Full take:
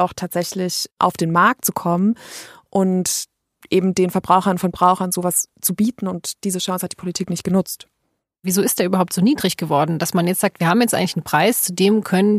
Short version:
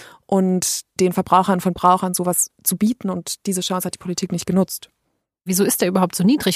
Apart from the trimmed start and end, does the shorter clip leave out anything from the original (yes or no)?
yes